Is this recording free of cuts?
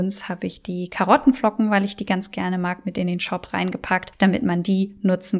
yes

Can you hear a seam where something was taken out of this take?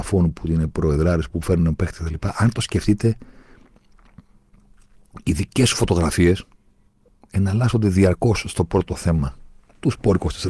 no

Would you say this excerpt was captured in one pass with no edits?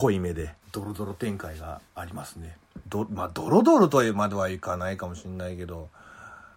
no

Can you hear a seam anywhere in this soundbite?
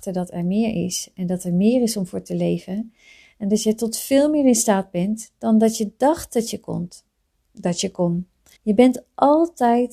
yes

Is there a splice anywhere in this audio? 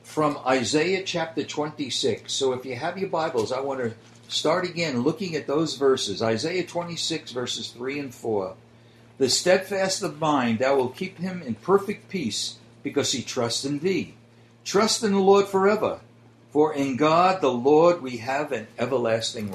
no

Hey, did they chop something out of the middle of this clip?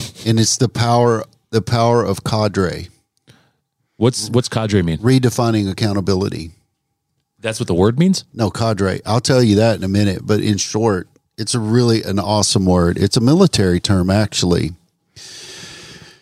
no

